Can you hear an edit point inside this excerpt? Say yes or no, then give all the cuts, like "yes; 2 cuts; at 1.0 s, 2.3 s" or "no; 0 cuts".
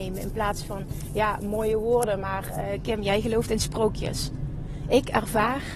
no; 0 cuts